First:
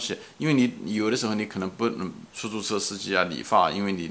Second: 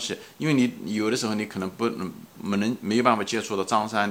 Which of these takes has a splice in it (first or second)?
first